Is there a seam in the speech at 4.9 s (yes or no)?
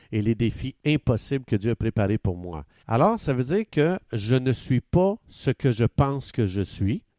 no